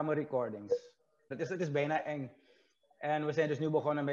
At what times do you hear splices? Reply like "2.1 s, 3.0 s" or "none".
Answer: 1.3 s